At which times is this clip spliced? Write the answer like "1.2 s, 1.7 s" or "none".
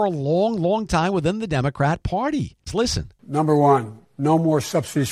2.7 s